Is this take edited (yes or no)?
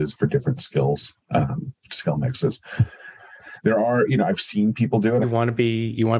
yes